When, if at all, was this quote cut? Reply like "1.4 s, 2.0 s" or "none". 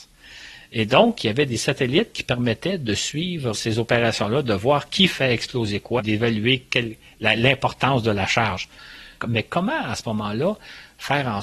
3.5 s, 6.0 s, 9.2 s